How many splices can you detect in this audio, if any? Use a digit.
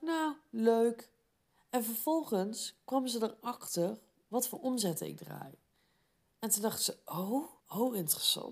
1